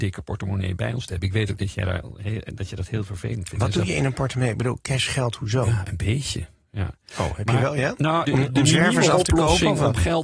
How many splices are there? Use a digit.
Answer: 1